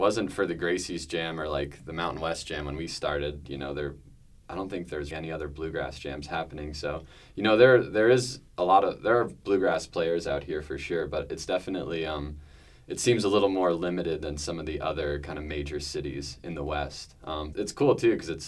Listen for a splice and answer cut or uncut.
cut